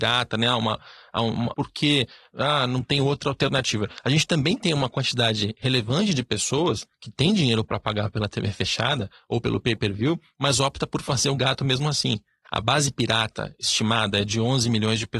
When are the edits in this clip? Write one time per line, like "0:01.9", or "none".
0:01.5
0:12.4